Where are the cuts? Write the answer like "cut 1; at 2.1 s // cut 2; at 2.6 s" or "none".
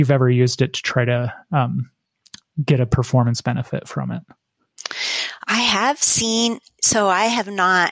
none